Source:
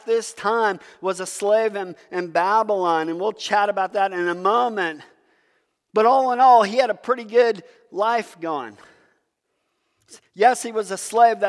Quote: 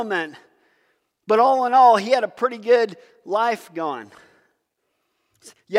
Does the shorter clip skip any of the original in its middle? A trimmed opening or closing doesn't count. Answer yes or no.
no